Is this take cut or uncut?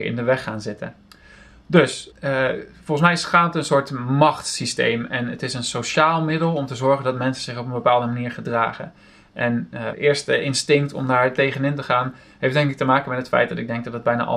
cut